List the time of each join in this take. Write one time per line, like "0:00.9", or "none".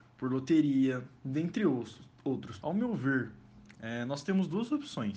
0:02.6
0:03.7